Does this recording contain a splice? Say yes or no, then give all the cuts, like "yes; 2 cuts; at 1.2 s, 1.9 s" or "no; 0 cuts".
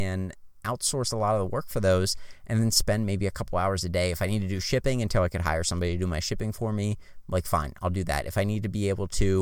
no; 0 cuts